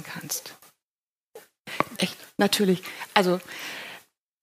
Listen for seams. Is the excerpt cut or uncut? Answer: cut